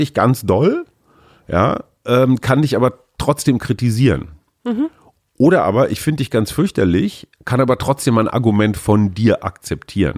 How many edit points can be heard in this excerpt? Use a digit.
0